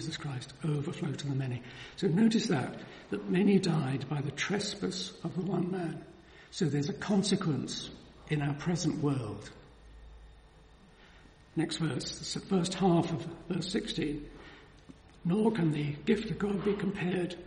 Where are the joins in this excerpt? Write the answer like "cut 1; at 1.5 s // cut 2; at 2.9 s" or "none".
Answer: none